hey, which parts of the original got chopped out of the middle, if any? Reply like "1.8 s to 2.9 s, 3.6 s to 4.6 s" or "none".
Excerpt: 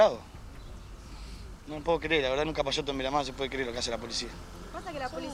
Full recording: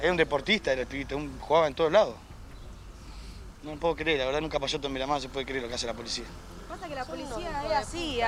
none